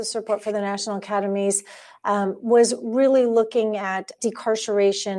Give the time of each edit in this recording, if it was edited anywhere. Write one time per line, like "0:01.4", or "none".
0:04.2